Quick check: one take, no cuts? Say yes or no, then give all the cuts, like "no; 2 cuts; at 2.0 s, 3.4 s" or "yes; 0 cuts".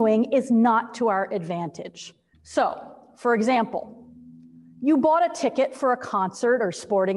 no; 1 cut; at 2.3 s